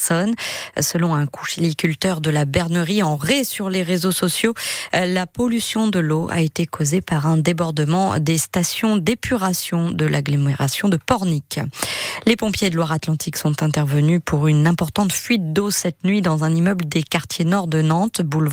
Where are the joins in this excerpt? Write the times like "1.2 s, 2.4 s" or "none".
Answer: none

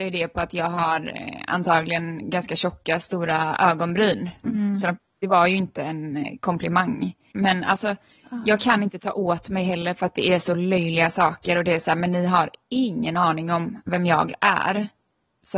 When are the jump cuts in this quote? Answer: 4.4 s, 7.3 s

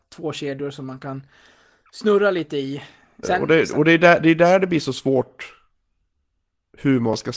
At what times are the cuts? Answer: 3.2 s

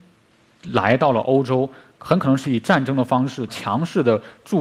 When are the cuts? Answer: 2.4 s, 3.5 s

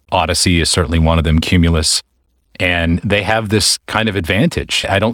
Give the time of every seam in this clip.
none

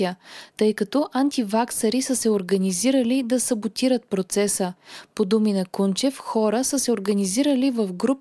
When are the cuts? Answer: none

